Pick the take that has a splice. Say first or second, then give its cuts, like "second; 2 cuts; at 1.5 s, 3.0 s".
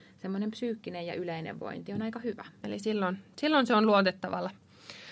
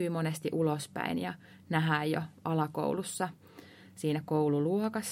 first; 1 cut; at 2.6 s